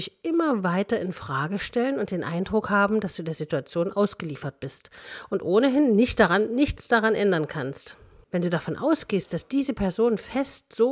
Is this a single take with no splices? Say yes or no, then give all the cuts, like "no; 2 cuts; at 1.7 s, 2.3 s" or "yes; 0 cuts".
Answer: no; 1 cut; at 8.2 s